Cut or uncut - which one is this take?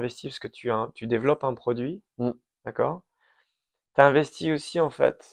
uncut